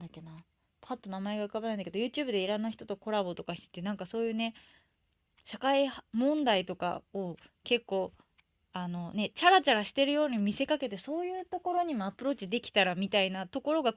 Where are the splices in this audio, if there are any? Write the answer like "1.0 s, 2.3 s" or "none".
none